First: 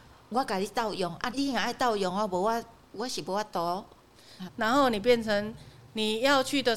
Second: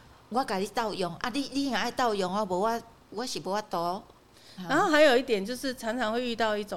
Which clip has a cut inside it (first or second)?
first